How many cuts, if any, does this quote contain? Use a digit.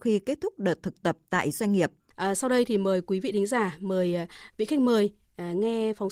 1